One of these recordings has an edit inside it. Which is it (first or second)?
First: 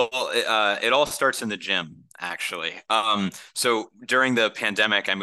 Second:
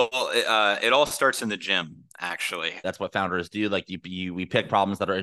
second